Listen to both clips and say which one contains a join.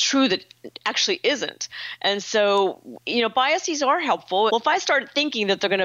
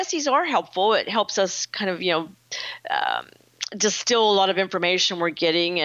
first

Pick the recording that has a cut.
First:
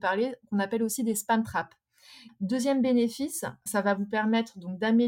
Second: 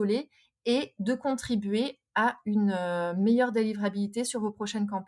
first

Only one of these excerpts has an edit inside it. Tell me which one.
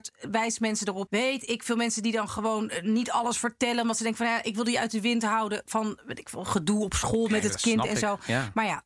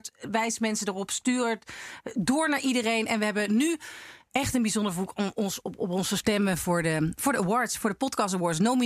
first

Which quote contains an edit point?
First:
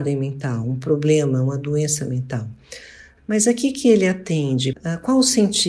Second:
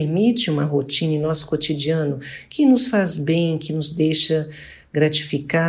first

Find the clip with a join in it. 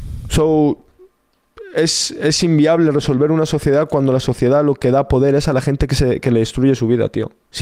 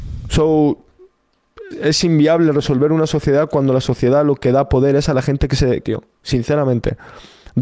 second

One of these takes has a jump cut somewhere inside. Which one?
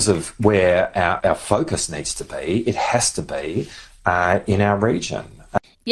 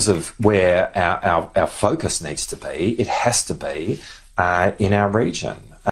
first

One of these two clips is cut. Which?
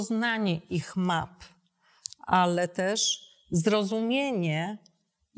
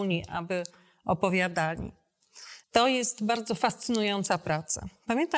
second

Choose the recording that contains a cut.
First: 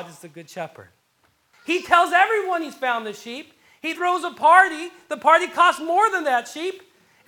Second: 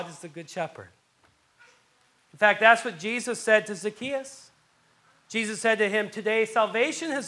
first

